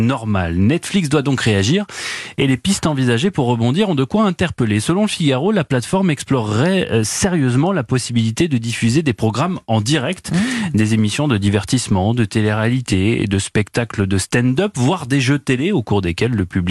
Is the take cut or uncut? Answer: uncut